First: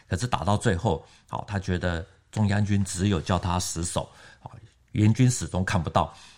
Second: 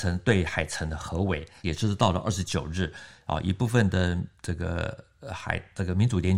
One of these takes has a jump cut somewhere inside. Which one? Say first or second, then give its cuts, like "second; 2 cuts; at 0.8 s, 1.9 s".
second; 1 cut; at 1.6 s